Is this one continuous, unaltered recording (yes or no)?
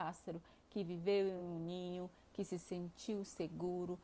yes